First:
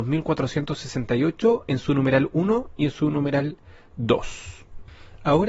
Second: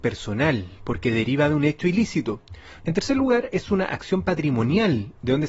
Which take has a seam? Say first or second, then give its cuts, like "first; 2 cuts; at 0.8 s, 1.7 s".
second; 1 cut; at 2.8 s